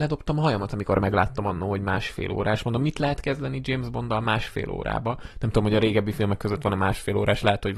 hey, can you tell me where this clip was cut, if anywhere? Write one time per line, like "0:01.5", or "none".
none